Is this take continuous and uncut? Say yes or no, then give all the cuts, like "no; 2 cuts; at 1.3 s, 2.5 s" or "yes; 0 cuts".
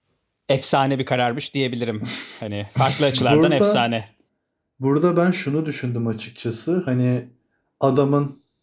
yes; 0 cuts